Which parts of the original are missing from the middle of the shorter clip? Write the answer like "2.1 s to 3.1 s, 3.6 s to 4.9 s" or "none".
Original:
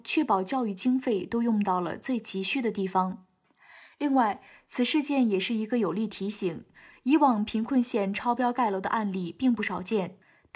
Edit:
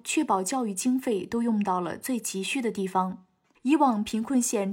3.5 s to 7.0 s

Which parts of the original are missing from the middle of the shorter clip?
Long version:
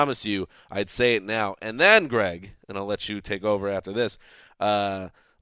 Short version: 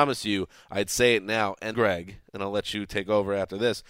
1.7 s to 2.1 s

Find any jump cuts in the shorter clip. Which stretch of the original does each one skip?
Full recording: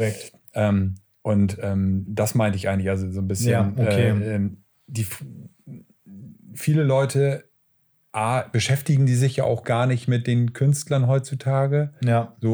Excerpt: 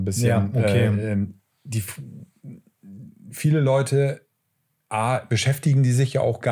none

